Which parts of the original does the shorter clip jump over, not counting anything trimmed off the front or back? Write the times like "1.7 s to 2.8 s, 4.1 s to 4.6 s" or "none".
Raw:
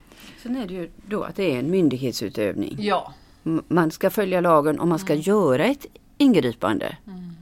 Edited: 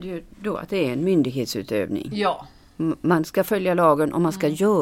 none